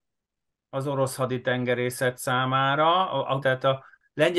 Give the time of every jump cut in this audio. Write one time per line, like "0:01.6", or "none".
0:03.4